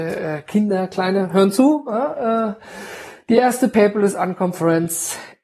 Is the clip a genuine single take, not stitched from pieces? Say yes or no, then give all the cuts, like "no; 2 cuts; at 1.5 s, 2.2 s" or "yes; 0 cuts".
yes; 0 cuts